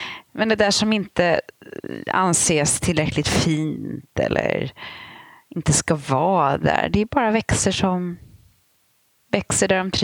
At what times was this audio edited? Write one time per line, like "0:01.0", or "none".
none